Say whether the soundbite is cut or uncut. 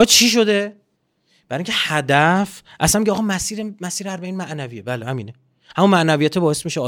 uncut